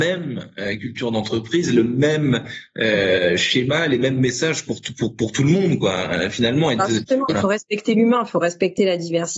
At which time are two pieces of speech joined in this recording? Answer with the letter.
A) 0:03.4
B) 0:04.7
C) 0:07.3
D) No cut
C